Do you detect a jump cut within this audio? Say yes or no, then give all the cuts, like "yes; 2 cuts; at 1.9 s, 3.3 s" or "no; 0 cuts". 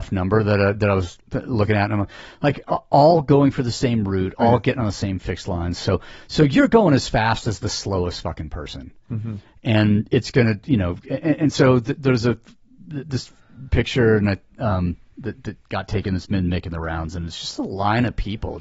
no; 0 cuts